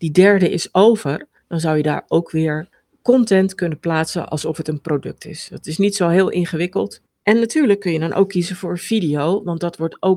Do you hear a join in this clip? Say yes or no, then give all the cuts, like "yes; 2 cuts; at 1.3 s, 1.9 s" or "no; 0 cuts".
yes; 1 cut; at 7.1 s